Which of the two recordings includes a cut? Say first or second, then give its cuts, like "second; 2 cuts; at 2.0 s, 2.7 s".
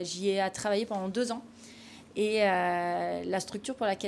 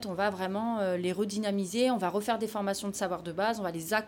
first; 1 cut; at 2.0 s